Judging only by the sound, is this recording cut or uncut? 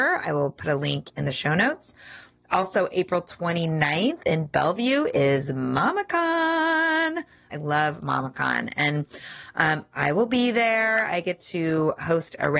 cut